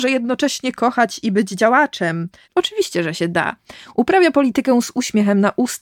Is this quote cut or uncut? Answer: cut